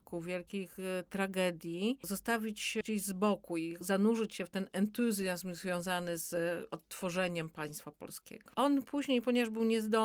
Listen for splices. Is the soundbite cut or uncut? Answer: cut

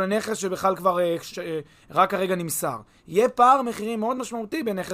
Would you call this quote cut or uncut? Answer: cut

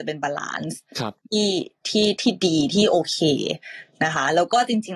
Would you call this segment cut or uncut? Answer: uncut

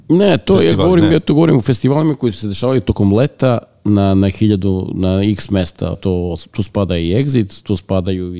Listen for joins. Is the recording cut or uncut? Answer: cut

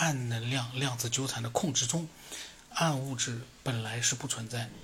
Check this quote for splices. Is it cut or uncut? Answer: uncut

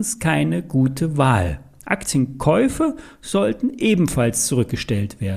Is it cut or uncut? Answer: uncut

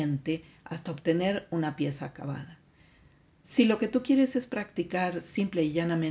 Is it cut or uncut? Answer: uncut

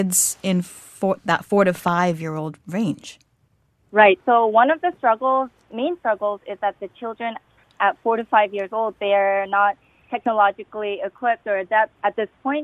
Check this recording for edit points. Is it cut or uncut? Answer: uncut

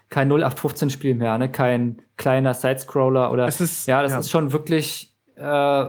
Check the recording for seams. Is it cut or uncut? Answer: uncut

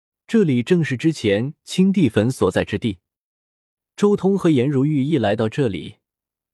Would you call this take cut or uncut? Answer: uncut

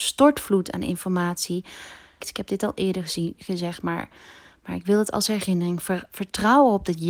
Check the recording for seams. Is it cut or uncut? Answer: cut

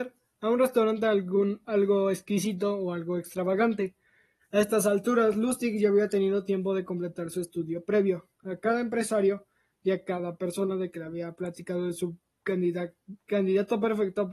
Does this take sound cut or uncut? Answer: cut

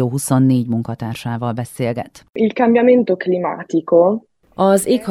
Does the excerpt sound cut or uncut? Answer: uncut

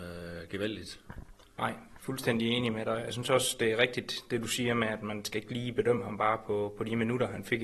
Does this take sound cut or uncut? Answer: uncut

